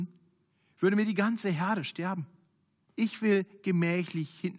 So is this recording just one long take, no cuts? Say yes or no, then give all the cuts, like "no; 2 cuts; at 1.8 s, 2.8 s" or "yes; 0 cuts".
no; 1 cut; at 2.9 s